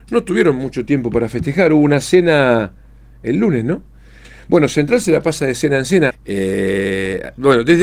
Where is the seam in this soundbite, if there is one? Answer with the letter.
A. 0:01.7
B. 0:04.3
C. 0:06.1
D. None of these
C